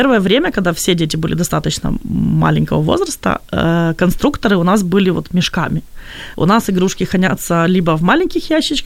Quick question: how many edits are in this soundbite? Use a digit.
1